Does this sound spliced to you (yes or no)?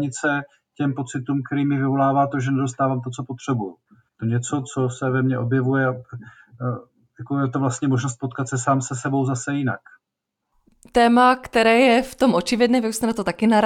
yes